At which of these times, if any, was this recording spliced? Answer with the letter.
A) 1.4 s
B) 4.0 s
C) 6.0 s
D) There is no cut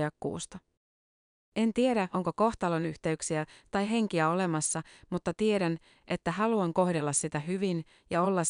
C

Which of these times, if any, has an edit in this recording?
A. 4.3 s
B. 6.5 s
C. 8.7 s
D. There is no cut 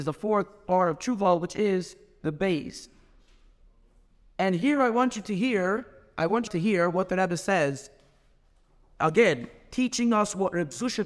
B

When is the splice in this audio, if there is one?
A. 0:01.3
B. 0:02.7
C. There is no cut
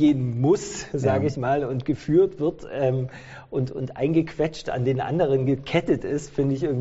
C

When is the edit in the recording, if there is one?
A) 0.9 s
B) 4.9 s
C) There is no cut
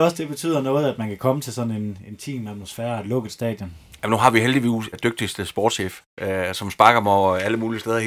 B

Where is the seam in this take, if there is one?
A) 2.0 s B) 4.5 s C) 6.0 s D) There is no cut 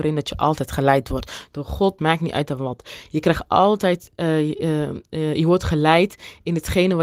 A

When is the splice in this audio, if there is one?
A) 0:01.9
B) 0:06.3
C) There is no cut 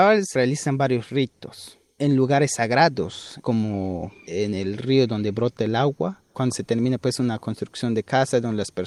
B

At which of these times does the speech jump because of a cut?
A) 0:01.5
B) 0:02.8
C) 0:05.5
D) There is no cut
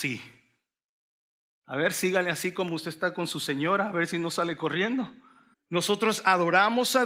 C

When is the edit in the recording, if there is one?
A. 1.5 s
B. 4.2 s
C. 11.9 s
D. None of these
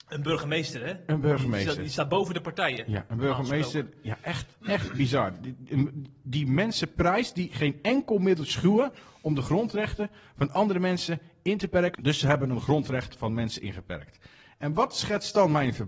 C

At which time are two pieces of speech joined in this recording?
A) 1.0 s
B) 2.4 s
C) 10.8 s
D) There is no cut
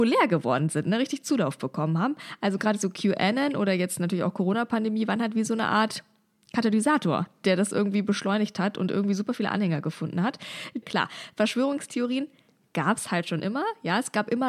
C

